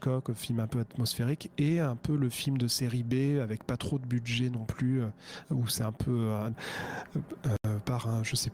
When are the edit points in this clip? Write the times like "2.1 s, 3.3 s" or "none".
5.4 s, 6.5 s